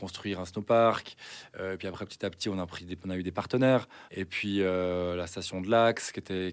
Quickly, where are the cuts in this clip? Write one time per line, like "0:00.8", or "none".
0:04.1